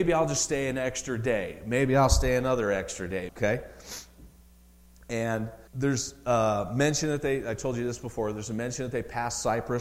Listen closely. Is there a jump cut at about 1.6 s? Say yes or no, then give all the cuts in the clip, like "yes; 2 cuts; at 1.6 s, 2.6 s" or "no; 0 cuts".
no; 2 cuts; at 3.3 s, 5.7 s